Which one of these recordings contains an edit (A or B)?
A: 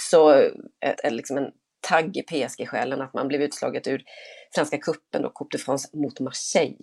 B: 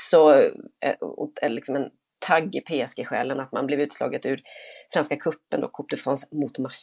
A